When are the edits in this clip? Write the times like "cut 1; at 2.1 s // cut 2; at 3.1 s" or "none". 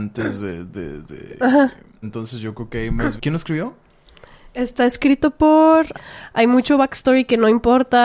cut 1; at 2.0 s // cut 2; at 3.2 s // cut 3; at 5.9 s